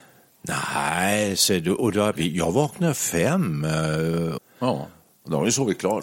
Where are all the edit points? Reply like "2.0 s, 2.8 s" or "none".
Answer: 2.2 s, 4.4 s

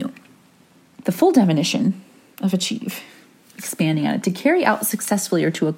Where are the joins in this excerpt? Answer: 1.0 s

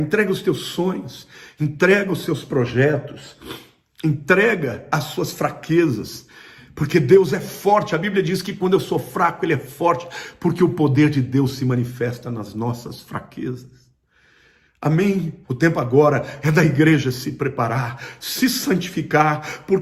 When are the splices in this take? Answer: 15.4 s, 18.2 s

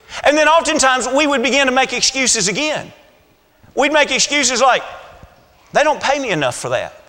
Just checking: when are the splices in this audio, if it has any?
none

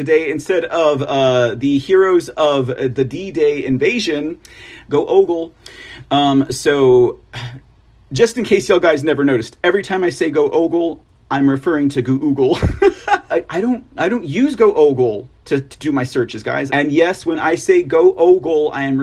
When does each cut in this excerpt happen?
4.9 s, 13.3 s, 16.7 s

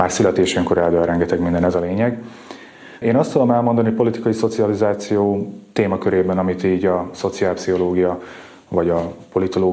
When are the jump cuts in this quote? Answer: 3.0 s

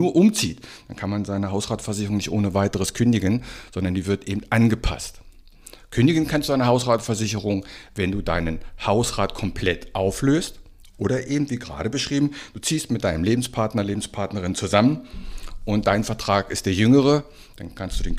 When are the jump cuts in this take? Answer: none

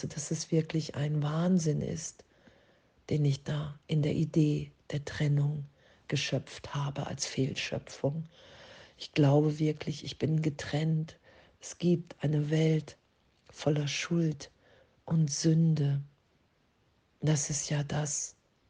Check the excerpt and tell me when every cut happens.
none

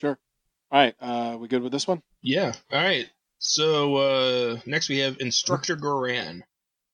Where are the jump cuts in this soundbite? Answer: none

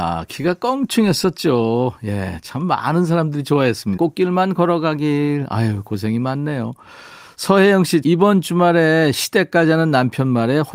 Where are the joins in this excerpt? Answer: 4.0 s, 8.0 s

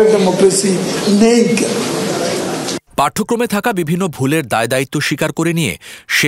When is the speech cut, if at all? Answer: 2.9 s

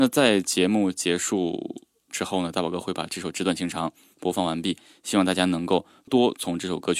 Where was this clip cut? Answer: 6.1 s

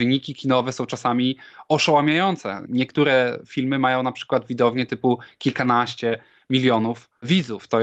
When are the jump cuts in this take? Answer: none

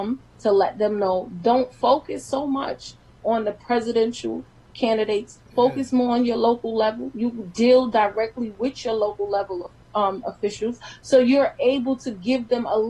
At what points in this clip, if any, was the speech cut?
none

